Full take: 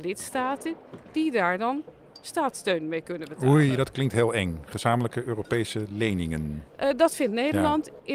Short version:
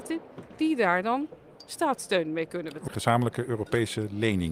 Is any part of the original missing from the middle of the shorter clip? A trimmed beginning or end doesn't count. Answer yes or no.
yes